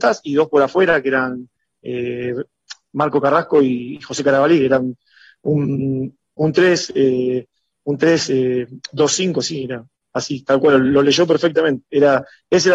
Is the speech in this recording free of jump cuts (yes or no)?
yes